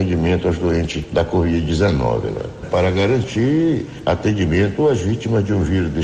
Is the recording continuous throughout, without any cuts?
no; 1 cut; at 2.6 s

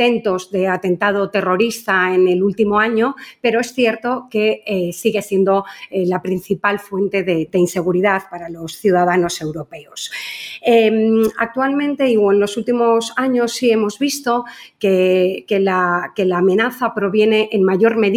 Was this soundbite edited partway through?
no; 0 cuts

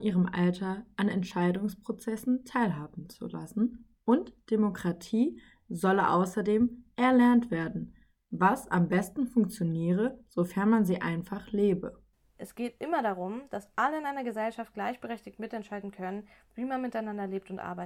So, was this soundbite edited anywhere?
no; 0 cuts

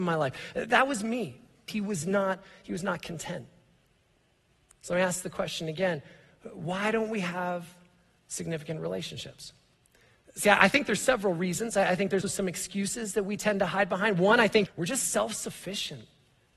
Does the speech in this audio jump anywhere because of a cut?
yes; 3 cuts; at 1.7 s, 12.2 s, 14.7 s

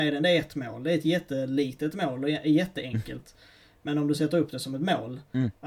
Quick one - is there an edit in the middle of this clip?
no; 0 cuts

